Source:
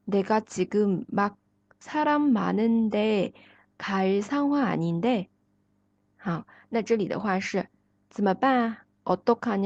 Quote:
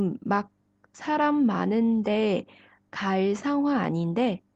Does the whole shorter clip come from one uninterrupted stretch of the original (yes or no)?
yes